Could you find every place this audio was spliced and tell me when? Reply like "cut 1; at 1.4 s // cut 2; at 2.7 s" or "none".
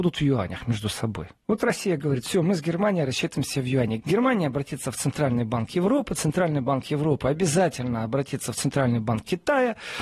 cut 1; at 4.0 s